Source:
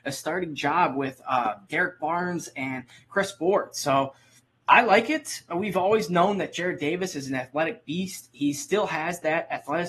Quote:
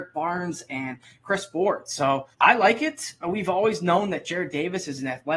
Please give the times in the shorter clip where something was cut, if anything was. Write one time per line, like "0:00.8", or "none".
0:02.3